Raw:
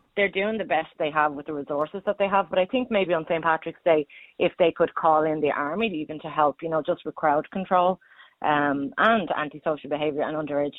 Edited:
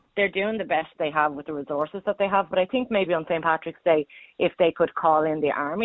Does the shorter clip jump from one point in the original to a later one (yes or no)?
no